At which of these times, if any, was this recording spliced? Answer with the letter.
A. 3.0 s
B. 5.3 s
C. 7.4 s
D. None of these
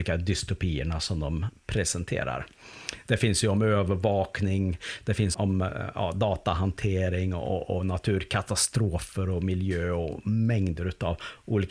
B